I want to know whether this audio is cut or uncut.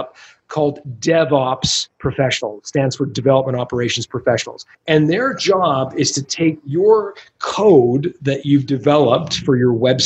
cut